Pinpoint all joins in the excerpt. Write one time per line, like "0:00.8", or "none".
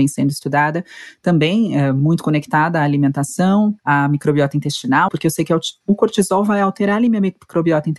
0:03.8
0:05.1